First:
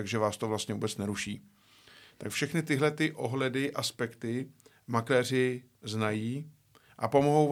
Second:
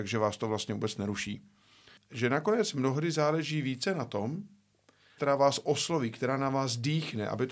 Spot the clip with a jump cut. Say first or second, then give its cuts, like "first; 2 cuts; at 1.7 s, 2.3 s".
second; 2 cuts; at 2.0 s, 5.2 s